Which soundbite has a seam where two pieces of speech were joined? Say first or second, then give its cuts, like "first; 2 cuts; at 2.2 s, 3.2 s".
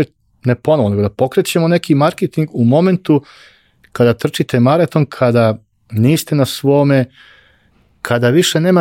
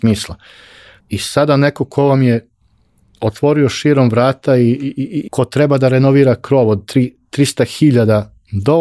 second; 2 cuts; at 1.0 s, 5.3 s